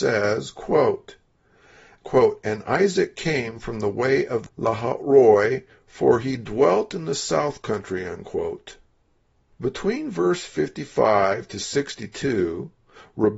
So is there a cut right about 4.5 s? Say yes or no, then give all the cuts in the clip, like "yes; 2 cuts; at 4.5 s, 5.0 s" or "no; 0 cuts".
yes; 1 cut; at 4.5 s